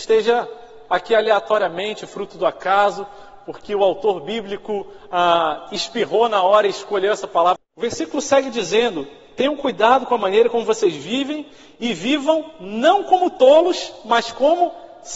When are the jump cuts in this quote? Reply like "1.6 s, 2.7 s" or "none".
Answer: 7.6 s